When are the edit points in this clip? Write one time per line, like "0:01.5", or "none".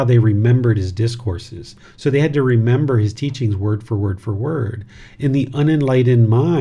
0:01.8